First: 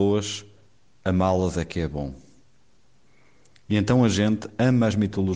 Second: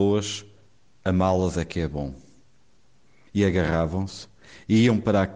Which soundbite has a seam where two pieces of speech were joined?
second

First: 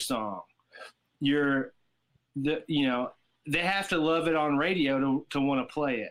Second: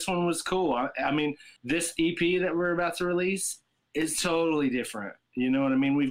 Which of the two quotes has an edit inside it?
second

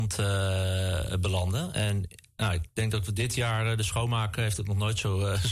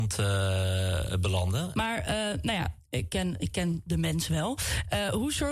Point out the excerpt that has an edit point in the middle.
second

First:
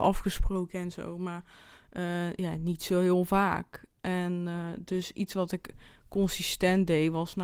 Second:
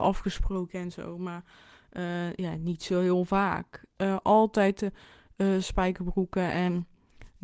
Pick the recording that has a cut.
second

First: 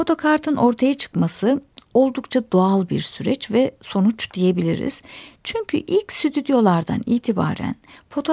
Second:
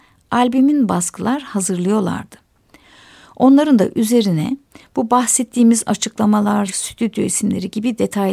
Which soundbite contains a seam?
second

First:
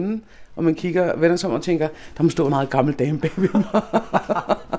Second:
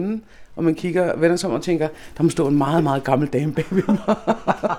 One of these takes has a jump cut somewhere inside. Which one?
first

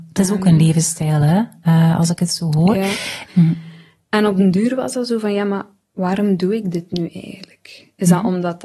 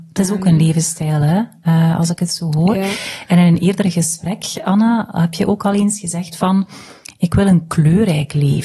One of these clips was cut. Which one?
first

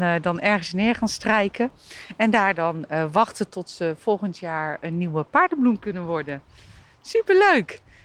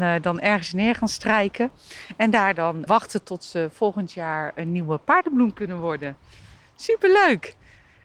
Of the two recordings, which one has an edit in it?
second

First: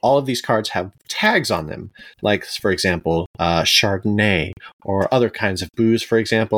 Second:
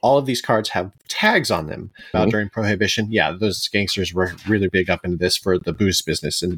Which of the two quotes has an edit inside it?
second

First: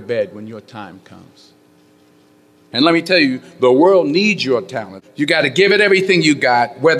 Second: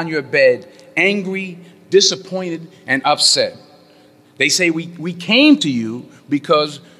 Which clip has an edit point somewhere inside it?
first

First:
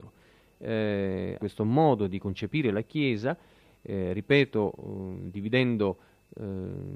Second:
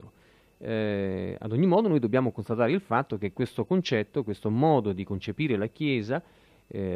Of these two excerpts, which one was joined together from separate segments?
first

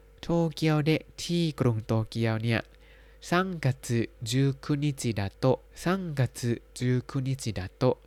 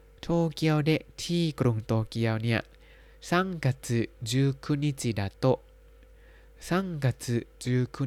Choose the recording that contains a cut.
first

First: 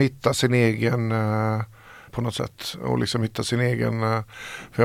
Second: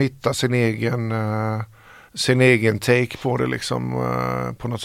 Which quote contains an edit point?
first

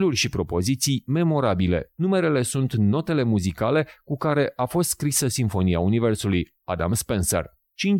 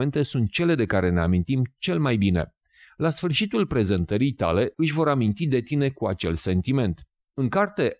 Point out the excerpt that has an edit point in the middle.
second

